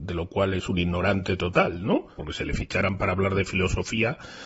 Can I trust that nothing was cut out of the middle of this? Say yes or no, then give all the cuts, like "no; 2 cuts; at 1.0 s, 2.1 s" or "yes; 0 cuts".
no; 1 cut; at 2.2 s